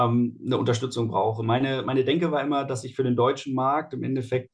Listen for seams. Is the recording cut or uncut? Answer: uncut